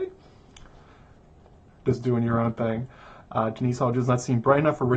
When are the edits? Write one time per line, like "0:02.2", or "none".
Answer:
0:01.7
0:03.2